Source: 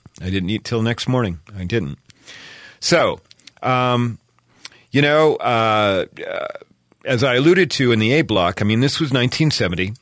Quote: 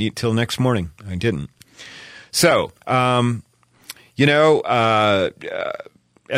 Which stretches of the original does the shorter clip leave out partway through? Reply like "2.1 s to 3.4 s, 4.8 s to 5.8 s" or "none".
3.3 s to 3.6 s